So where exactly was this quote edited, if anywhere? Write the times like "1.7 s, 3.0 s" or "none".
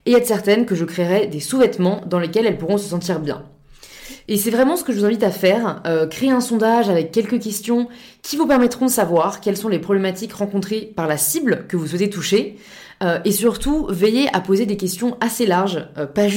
none